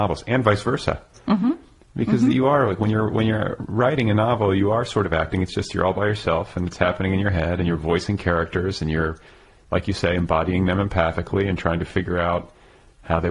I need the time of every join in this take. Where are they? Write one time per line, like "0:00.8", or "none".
none